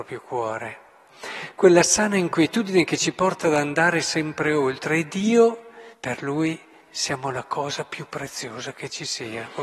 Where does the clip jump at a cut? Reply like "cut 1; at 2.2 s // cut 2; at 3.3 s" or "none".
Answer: cut 1; at 5.9 s